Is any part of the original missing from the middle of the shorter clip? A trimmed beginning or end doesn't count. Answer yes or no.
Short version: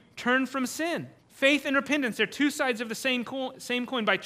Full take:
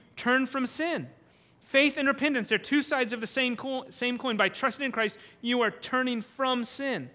yes